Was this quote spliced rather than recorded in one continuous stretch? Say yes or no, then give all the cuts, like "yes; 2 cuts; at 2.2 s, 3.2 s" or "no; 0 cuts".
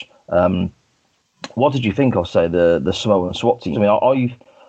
yes; 1 cut; at 3.7 s